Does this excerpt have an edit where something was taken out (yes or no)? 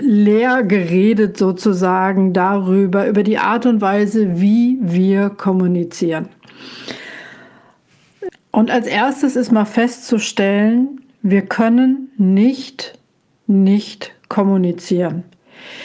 yes